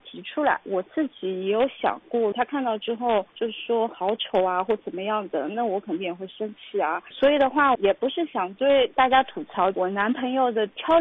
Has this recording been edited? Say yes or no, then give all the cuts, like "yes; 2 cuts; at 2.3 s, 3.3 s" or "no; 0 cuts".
yes; 2 cuts; at 2.3 s, 7.7 s